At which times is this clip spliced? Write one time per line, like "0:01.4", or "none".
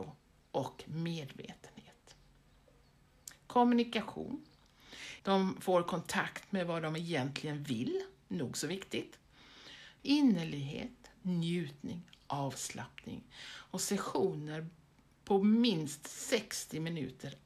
0:05.2
0:10.0